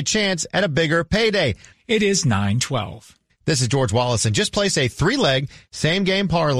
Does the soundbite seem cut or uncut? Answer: cut